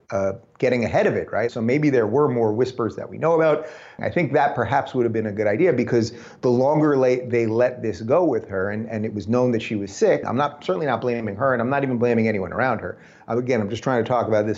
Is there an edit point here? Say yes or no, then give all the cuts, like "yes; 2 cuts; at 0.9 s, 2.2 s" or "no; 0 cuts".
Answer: yes; 3 cuts; at 1.5 s, 4.0 s, 10.2 s